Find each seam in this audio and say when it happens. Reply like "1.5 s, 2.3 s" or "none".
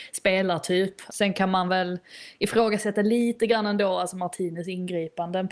1.1 s